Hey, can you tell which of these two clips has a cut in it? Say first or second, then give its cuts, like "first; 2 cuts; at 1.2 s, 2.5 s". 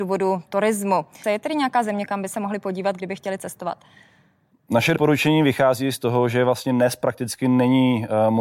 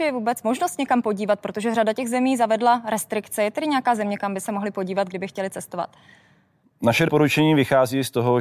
first; 1 cut; at 1.2 s